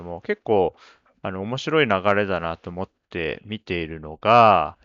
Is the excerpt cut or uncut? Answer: uncut